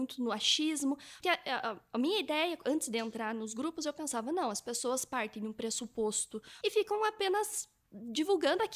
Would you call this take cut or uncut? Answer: cut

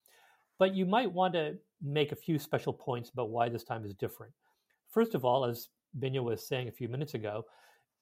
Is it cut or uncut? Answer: uncut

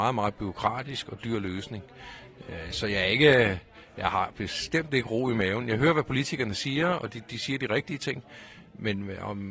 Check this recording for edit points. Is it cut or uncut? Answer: uncut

